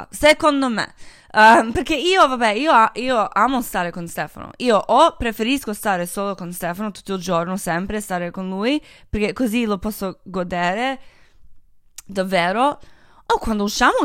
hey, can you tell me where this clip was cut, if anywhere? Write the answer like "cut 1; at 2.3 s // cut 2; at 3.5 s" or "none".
none